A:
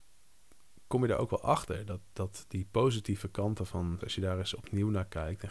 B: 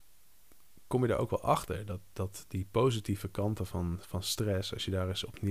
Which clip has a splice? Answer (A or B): A